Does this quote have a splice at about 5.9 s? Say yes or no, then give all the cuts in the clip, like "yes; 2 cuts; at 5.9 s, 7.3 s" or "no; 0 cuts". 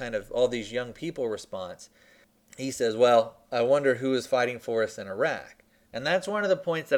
yes; 1 cut; at 5.9 s